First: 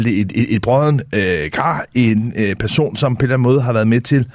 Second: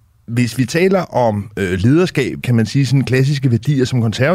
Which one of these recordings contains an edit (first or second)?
second